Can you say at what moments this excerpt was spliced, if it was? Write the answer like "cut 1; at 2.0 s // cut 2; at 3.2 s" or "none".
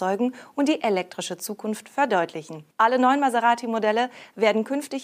cut 1; at 2.7 s